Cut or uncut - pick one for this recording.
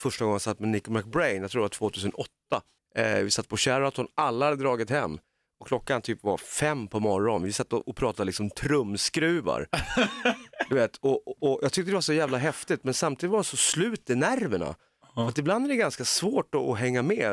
uncut